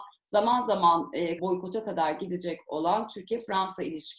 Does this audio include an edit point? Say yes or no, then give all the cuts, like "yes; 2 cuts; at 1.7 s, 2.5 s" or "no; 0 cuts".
yes; 1 cut; at 1.4 s